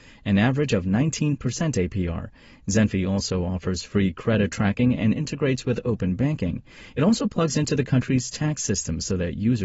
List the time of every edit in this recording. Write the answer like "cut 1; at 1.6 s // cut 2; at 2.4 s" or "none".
none